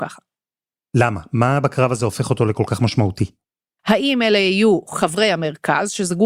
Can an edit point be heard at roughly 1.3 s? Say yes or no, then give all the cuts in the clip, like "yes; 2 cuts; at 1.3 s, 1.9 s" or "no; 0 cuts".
no; 1 cut; at 3.8 s